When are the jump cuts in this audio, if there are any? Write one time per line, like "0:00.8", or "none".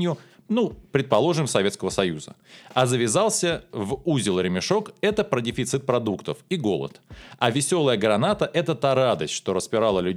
none